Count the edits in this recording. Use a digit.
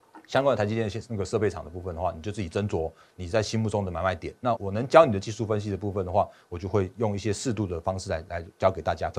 1